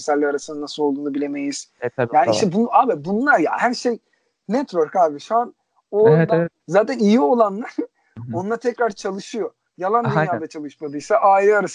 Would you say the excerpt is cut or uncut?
cut